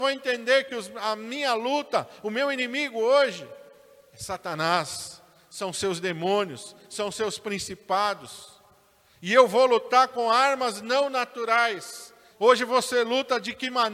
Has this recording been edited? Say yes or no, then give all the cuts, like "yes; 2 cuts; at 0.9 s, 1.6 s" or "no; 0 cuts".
yes; 1 cut; at 12.3 s